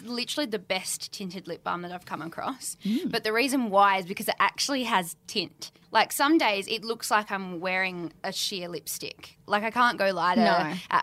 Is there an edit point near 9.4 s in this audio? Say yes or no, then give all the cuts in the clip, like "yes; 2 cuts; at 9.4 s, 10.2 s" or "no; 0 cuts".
yes; 2 cuts; at 5.8 s, 9.4 s